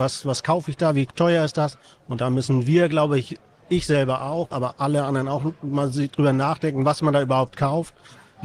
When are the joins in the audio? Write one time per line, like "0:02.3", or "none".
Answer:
0:01.9